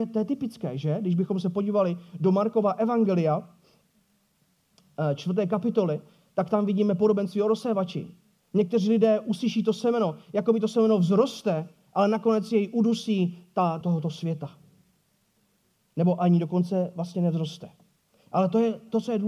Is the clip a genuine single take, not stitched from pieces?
no; 1 cut; at 13.8 s

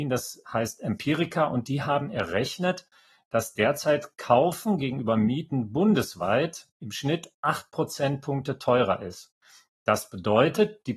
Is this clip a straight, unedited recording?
yes; 0 cuts

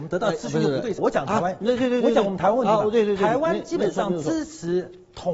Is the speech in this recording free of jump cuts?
no; 1 cut; at 1.0 s

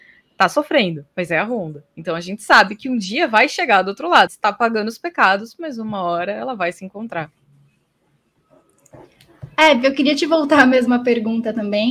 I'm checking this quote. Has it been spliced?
yes; 1 cut; at 4.3 s

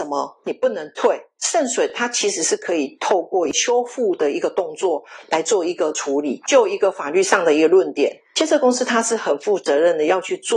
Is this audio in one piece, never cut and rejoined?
yes; 0 cuts

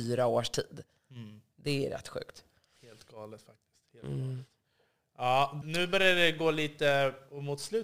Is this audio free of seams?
no; 1 cut; at 5.6 s

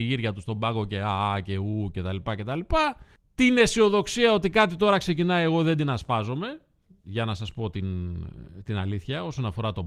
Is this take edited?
no; 0 cuts

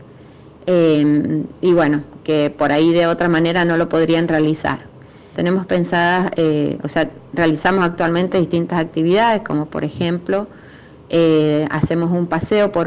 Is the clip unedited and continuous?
no; 1 cut; at 5.3 s

